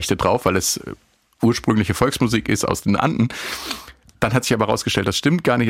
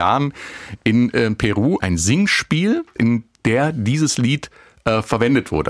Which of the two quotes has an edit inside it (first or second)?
second